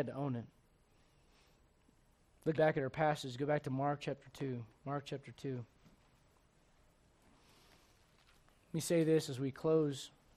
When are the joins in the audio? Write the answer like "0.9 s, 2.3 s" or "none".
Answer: 2.5 s